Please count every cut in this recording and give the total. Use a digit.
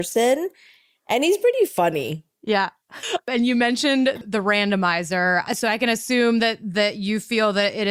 1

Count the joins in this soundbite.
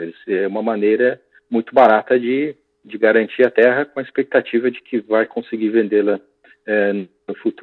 0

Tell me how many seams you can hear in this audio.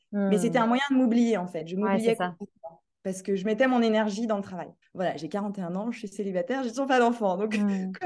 1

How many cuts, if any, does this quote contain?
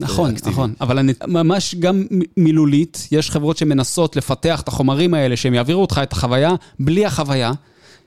1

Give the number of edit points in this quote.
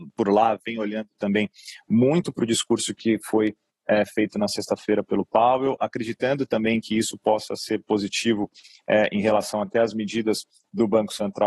0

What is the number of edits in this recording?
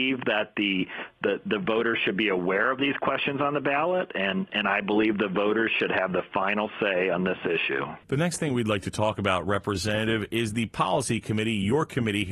1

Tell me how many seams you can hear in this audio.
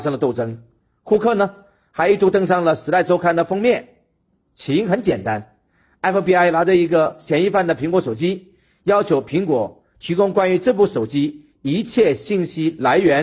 0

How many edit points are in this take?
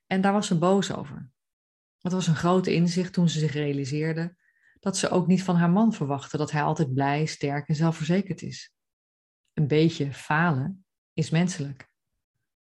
1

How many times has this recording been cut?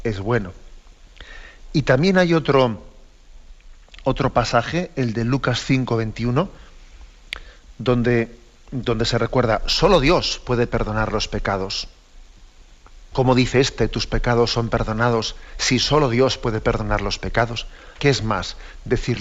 2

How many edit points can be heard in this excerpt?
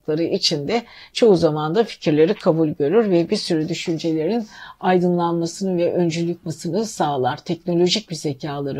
1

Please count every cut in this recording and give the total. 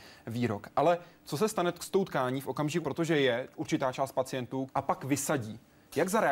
2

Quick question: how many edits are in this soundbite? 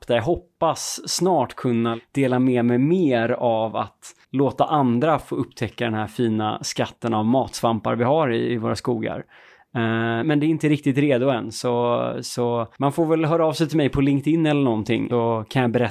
2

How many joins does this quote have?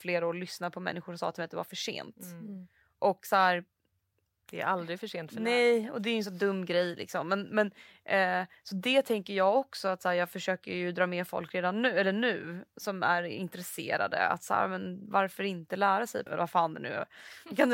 1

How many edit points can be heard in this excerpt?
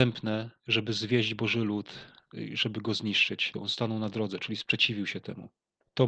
1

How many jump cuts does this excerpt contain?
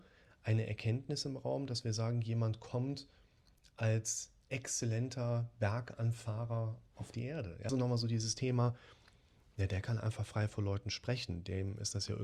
1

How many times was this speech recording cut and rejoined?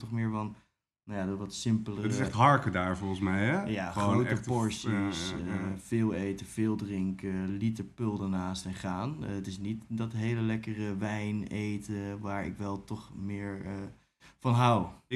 0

